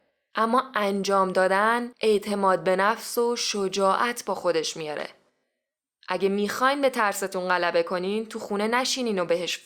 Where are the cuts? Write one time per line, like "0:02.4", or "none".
none